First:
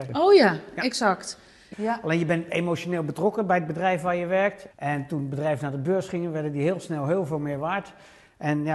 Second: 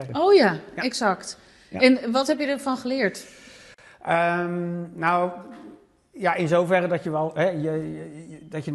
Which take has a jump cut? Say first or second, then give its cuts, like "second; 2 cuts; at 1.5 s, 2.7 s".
first; 2 cuts; at 1.7 s, 4.7 s